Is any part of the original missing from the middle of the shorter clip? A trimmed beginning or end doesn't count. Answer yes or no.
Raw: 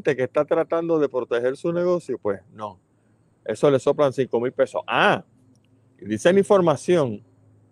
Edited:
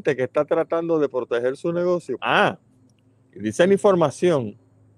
yes